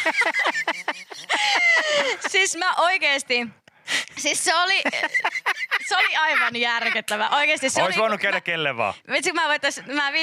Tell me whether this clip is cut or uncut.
uncut